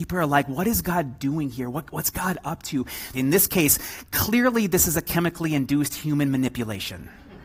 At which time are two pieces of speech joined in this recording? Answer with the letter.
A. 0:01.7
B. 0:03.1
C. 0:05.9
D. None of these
B